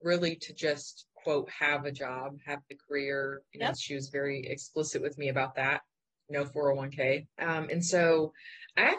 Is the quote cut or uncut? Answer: cut